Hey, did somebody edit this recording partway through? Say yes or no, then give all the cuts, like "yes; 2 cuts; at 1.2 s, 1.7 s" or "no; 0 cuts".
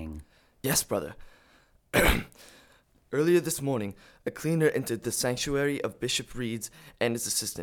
no; 0 cuts